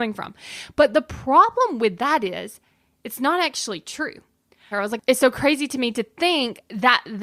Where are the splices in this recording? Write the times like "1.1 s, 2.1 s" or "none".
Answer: 4.7 s